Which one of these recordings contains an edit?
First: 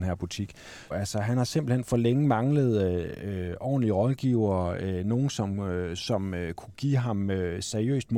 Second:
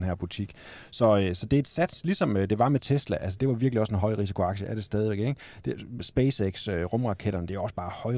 first; 1 cut; at 0.9 s

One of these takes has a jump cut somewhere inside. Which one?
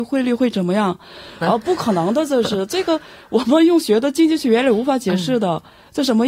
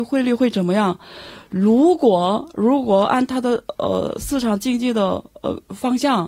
first; 1 cut; at 1.4 s

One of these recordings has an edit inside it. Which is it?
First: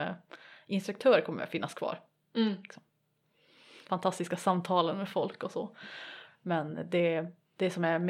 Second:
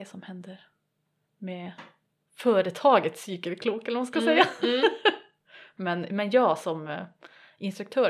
first; 2 cuts; at 3.9 s, 6.3 s

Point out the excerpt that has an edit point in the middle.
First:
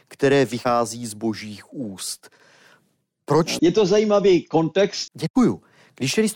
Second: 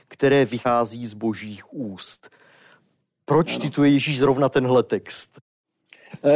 first; 2 cuts; at 3.6 s, 5.1 s

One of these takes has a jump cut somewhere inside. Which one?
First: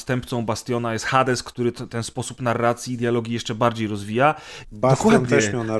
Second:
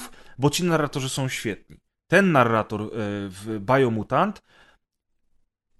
first; 1 cut; at 4.6 s

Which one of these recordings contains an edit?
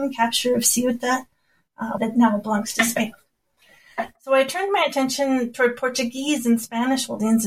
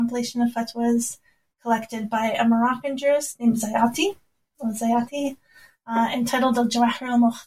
first; 1 cut; at 2.0 s

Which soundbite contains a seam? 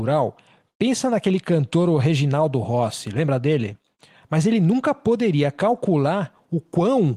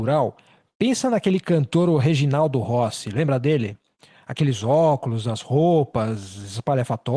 first; 1 cut; at 4.2 s

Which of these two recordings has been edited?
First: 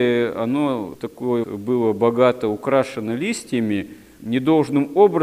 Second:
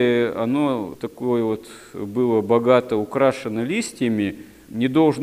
first; 1 cut; at 1.4 s

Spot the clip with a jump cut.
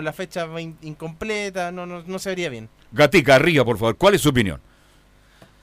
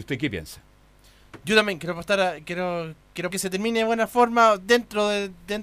second; 1 cut; at 3.3 s

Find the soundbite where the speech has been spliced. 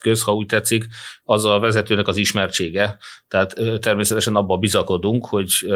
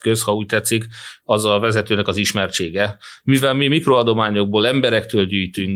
second; 1 cut; at 3.2 s

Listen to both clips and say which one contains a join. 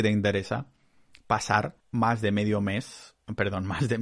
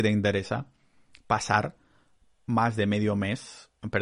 first; 1 cut; at 1.8 s

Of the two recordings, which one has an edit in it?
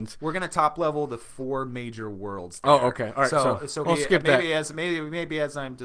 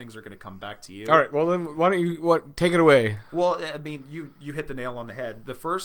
first; 1 cut; at 3.8 s

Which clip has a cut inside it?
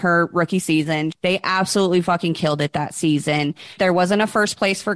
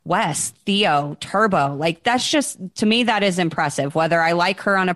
first; 2 cuts; at 1.1 s, 3.8 s

